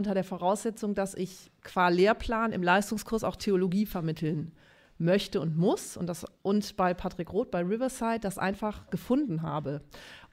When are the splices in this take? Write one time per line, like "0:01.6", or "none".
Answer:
none

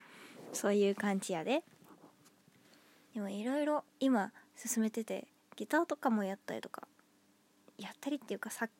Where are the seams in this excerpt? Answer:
0:03.9

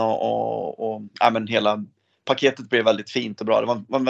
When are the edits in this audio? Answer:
none

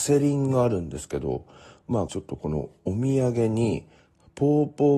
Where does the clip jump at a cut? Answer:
0:02.1

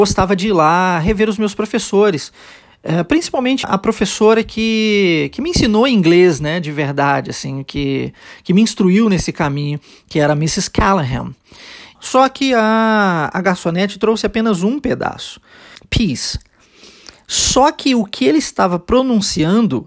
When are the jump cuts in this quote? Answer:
0:03.6
0:12.0
0:15.8

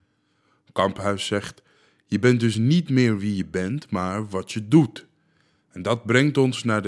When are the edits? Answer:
none

